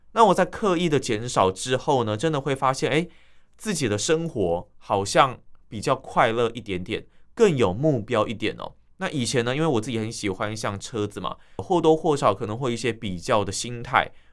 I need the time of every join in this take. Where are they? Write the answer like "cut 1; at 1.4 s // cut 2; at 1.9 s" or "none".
cut 1; at 11.6 s